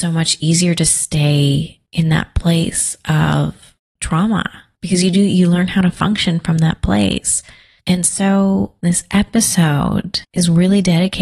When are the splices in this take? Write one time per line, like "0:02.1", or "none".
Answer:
none

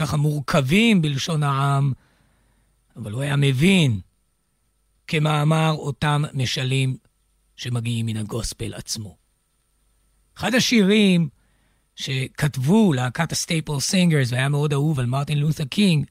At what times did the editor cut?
0:05.0

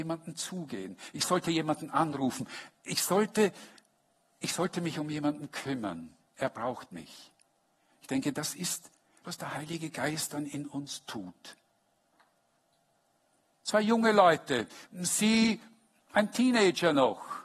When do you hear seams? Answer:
0:09.2
0:13.5

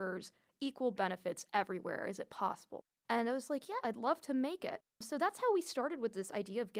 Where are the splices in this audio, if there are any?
0:03.8

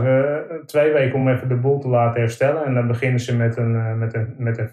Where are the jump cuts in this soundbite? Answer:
none

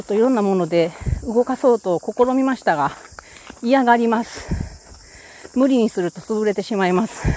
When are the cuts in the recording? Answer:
none

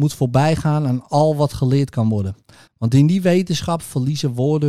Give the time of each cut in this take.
0:02.7

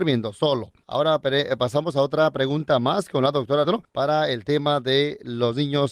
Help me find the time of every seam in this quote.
0:03.6

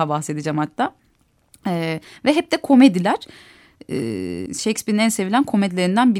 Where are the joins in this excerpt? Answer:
0:04.5

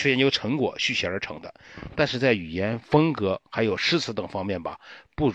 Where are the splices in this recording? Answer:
none

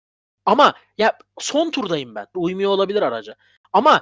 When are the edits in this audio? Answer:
0:02.3

